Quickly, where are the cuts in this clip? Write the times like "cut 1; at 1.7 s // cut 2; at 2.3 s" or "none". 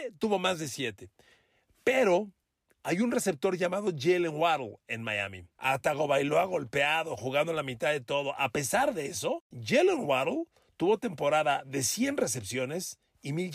cut 1; at 5.5 s